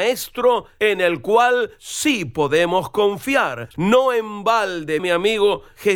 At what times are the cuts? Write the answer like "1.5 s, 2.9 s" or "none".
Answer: 3.7 s, 5.0 s